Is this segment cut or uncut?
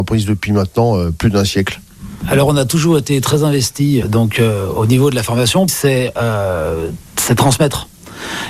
cut